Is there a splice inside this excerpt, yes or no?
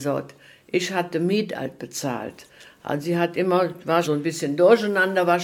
yes